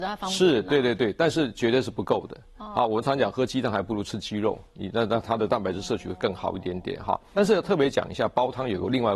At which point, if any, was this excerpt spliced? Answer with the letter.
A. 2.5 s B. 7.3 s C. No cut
B